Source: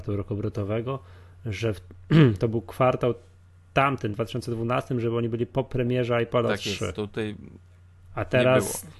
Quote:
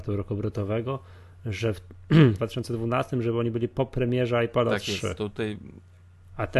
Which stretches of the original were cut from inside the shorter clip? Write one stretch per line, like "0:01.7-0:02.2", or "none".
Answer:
0:02.4-0:04.2